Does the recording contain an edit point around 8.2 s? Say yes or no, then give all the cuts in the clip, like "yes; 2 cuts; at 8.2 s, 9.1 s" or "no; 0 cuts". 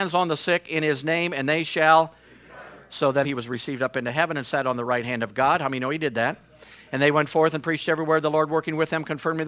no; 2 cuts; at 3.2 s, 6.9 s